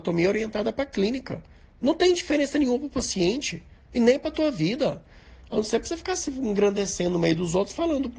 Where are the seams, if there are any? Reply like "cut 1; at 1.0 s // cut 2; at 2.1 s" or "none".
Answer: none